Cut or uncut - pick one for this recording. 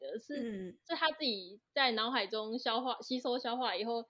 uncut